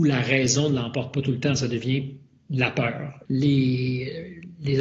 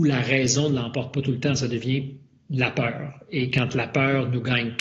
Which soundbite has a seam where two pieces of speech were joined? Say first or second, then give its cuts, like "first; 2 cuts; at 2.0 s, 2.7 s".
first; 1 cut; at 3.3 s